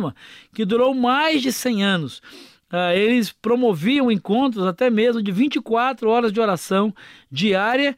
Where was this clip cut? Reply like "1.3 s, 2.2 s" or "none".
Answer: none